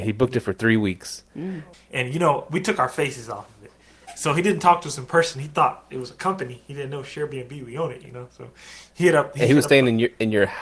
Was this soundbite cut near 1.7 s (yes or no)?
yes